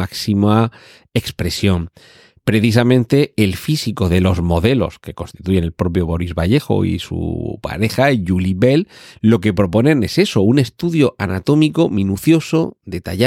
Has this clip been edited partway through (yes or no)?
no